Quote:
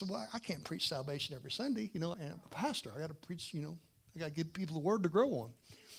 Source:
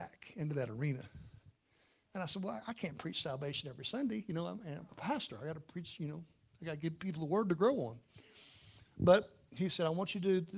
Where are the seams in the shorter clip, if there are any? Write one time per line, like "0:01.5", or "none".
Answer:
0:02.1